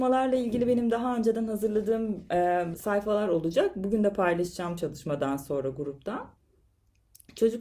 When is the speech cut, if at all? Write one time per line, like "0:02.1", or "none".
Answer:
0:02.7